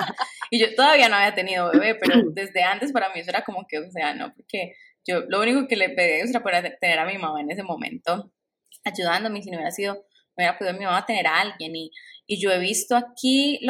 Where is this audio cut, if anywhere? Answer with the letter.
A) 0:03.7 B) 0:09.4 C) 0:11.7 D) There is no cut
D